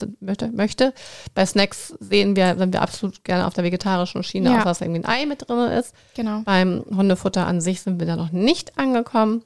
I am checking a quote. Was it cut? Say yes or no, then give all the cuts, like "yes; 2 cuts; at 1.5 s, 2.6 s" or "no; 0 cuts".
no; 0 cuts